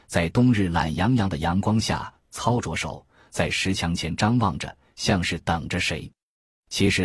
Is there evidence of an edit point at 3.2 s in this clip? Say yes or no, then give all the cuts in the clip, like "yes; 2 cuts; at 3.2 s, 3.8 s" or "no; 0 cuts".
no; 0 cuts